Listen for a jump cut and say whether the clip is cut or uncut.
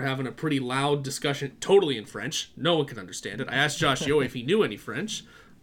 uncut